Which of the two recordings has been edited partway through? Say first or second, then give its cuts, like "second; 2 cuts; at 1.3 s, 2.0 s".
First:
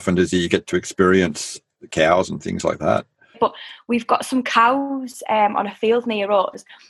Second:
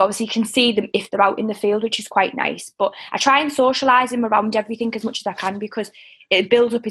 first; 1 cut; at 3.3 s